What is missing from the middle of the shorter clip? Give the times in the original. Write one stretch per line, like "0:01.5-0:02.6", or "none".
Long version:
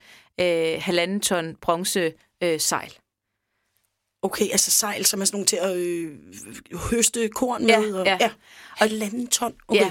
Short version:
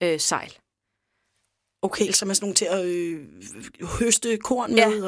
0:04.5-0:05.0